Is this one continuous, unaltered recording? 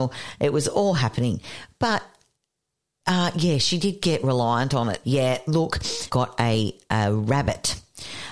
no; 2 cuts; at 5.0 s, 6.1 s

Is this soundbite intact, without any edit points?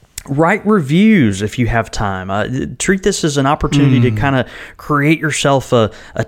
yes; 0 cuts

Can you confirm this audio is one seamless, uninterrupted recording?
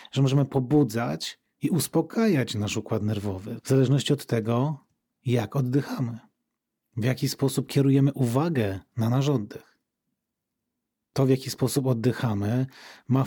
yes; 0 cuts

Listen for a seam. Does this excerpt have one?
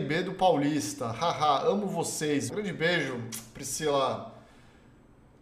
yes; 1 cut; at 2.5 s

